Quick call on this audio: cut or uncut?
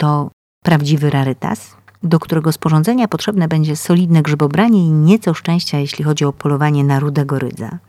uncut